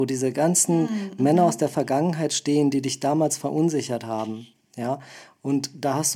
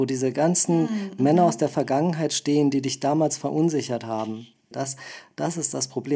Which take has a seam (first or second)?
second